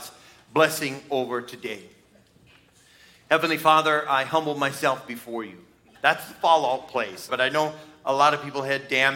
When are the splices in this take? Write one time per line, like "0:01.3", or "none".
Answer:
0:05.9
0:07.3